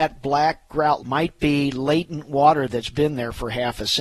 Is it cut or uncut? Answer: cut